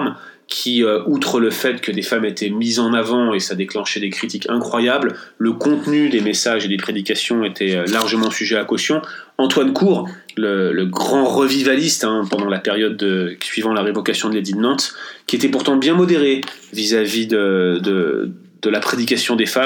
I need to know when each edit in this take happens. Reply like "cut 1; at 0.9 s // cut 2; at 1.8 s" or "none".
none